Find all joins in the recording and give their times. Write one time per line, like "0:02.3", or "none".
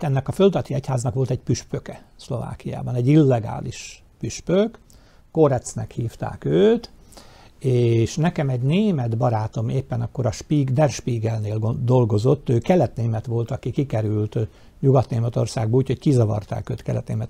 none